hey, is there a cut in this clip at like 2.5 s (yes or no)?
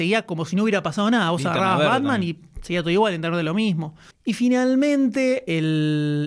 no